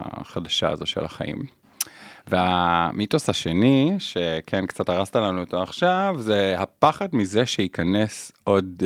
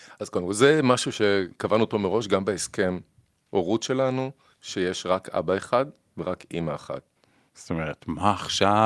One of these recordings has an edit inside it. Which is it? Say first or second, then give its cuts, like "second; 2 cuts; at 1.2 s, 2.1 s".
second; 2 cuts; at 4.5 s, 7.5 s